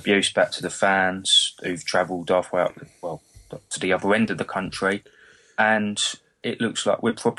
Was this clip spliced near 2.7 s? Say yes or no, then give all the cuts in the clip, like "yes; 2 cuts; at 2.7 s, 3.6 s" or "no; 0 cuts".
no; 0 cuts